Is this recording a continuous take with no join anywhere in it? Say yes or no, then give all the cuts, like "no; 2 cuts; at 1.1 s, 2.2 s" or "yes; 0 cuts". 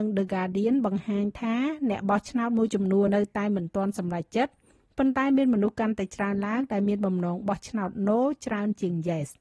no; 1 cut; at 3.1 s